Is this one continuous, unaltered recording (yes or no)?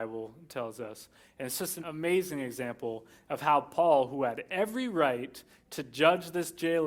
no